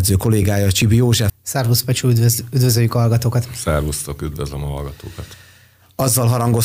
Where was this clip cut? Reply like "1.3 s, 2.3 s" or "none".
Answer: 1.3 s